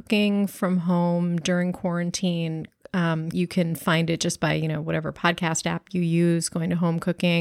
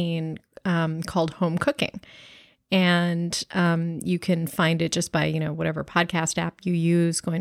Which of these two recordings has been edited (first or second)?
first